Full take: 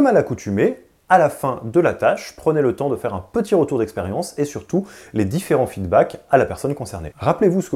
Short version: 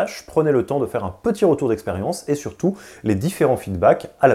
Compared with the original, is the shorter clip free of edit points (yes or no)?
yes